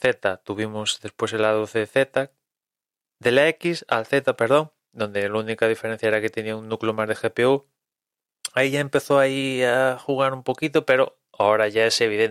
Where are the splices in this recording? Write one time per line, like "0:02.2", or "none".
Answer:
none